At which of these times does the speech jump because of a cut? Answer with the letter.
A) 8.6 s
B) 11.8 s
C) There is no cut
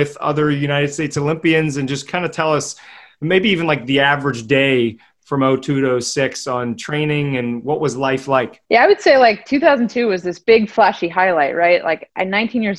A